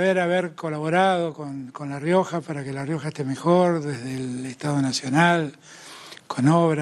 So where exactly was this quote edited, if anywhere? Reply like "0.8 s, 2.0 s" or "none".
none

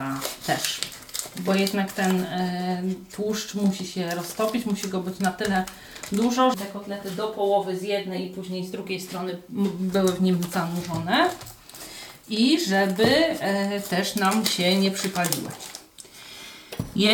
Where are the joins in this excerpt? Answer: 6.5 s

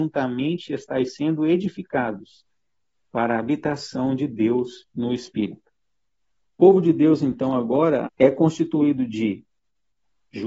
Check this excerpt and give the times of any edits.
6.5 s, 8.0 s

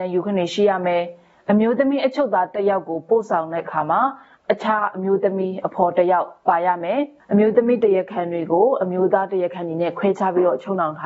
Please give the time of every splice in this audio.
none

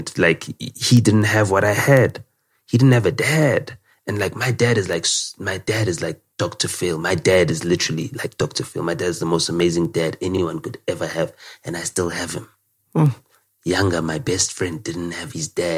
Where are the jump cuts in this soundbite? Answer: 6.3 s

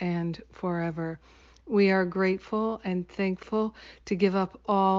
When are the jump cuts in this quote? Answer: none

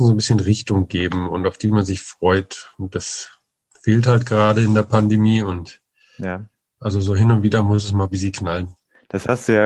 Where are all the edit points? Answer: 6.8 s

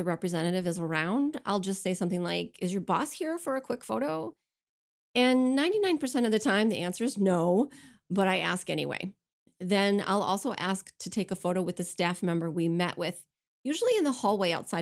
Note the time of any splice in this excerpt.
none

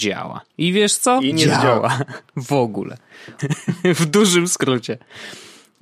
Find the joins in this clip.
1.3 s, 3.4 s

